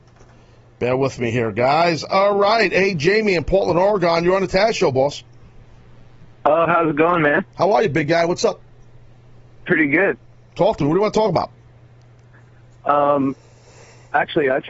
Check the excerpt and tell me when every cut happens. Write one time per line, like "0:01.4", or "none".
none